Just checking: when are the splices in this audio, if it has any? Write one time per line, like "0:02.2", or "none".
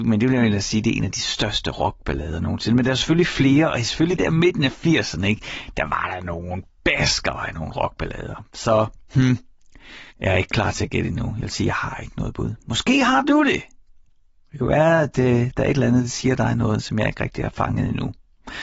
0:10.1